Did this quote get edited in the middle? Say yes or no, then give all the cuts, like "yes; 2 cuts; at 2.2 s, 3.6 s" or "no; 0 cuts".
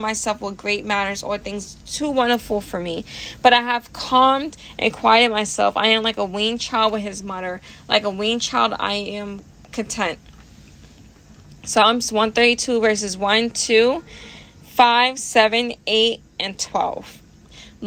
no; 0 cuts